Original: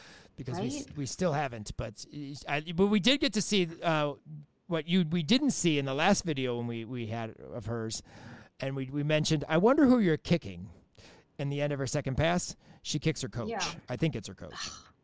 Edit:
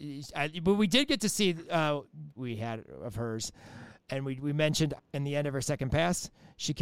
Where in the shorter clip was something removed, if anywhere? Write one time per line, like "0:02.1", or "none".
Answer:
0:02.4
0:05.0

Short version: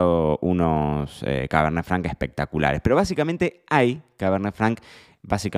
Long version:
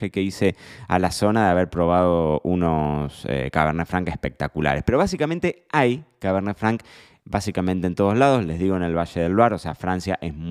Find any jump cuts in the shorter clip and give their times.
none

